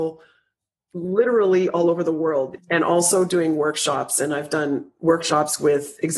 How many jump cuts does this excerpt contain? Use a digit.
1